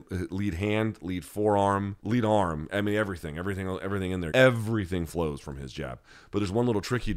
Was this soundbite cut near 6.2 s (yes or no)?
no